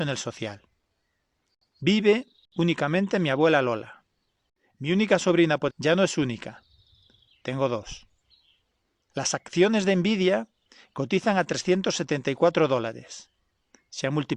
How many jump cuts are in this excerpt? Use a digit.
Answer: 2